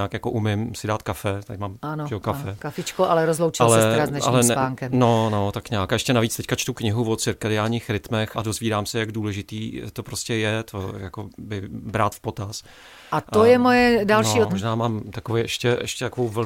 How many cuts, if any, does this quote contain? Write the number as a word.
two